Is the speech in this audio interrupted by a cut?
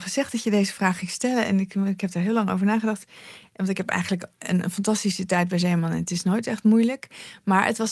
no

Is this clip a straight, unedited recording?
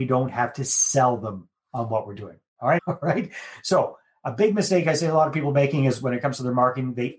no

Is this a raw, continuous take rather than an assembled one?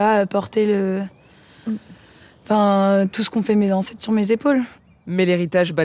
yes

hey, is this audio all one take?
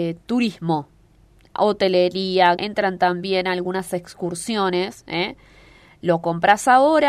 no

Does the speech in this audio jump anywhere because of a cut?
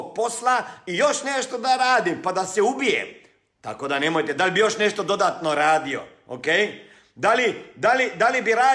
no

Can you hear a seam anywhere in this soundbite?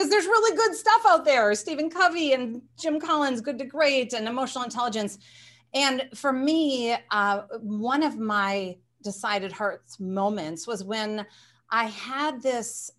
no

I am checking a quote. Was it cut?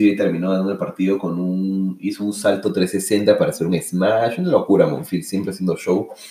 no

